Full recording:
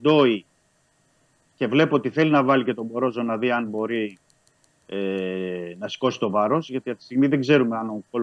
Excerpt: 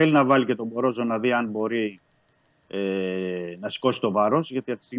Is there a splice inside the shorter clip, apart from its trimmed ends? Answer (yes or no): no